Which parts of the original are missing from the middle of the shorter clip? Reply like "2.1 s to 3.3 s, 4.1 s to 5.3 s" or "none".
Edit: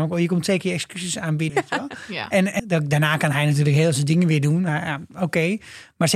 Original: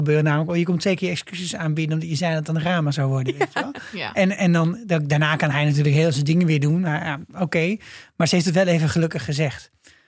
1.9 s to 3.3 s, 4.4 s to 4.8 s

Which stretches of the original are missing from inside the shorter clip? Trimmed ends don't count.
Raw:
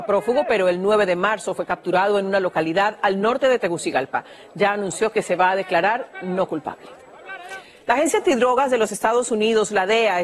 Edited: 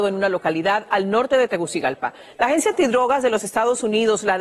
4.4 s to 7.8 s

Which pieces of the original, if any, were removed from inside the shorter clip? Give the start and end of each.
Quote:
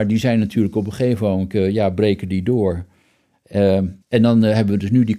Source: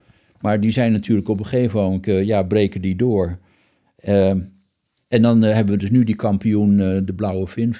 4.5 s to 5.0 s

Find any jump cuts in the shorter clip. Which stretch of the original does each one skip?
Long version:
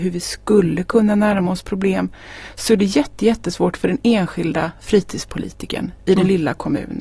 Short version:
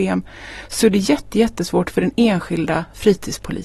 none

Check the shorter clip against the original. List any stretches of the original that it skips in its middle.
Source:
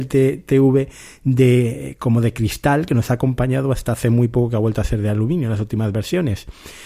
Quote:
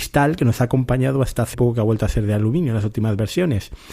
4.0 s to 4.3 s

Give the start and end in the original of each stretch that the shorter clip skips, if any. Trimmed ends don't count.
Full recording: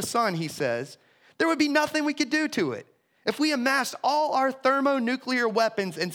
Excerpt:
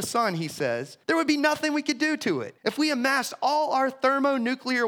1.0 s to 1.3 s, 2.9 s to 3.2 s

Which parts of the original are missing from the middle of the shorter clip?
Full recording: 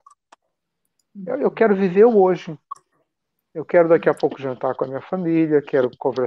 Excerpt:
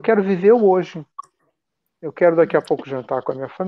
none

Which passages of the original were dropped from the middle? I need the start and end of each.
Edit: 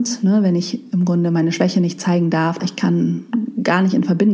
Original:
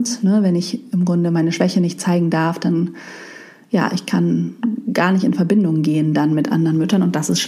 2.6 s to 3.9 s

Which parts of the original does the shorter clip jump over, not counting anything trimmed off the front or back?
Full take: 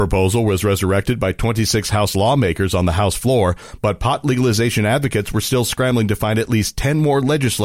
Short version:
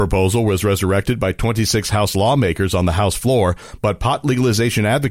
none

